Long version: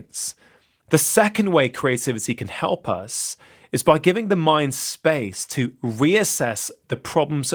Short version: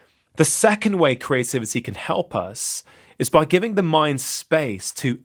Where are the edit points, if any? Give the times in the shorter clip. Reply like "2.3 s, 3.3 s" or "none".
none